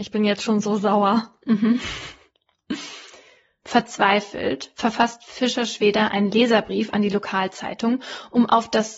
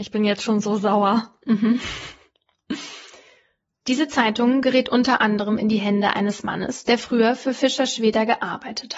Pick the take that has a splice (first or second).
first